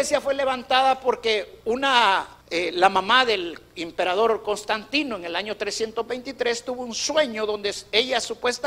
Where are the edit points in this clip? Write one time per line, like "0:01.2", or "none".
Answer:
0:02.4